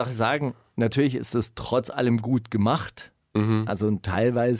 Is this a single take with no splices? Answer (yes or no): no